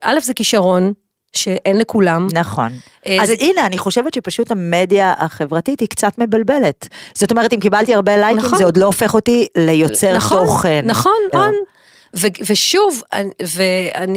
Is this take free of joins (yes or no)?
no